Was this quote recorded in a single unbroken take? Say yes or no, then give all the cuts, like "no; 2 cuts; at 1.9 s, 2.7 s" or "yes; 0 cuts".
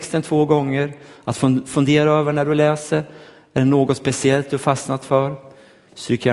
yes; 0 cuts